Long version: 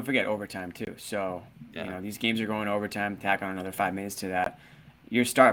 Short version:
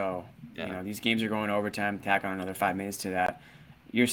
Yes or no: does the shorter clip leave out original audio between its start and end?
no